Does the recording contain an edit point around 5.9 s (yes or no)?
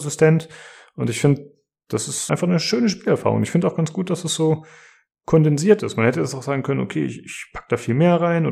no